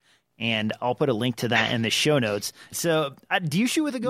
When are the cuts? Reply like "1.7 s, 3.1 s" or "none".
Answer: 2.7 s